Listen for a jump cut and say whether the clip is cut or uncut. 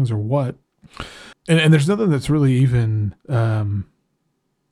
cut